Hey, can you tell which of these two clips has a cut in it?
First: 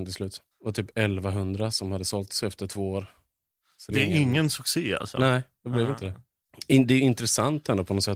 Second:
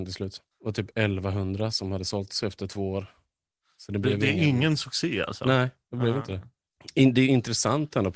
first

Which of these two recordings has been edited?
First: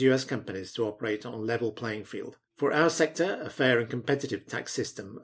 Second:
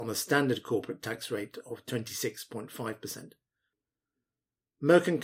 first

